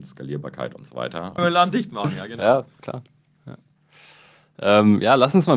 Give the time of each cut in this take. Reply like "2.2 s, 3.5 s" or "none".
1.4 s